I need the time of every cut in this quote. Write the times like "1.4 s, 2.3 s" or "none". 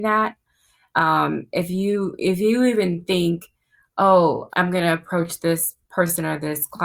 4.5 s